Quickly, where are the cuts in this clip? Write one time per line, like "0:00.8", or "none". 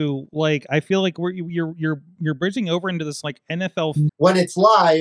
0:04.1

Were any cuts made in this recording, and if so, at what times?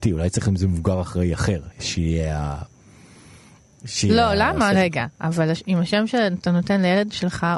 0:01.7
0:04.7

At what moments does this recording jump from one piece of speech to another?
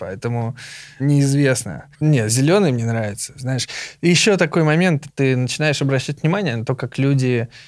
0:01.9
0:05.1

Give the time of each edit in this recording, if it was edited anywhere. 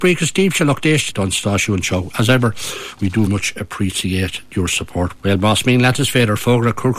0:01.1
0:03.3
0:05.2

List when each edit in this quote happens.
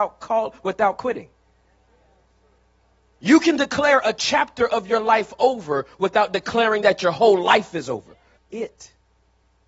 0:08.4

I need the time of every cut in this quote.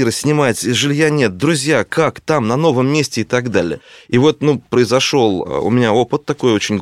0:04.7

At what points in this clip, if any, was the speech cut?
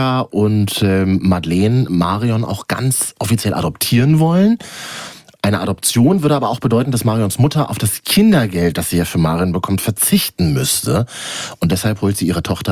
none

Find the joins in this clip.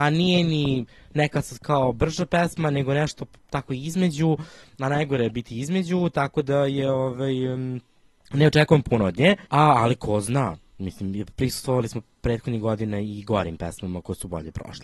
0:09.4

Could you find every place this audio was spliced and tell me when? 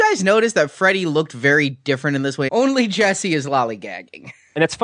0:02.5

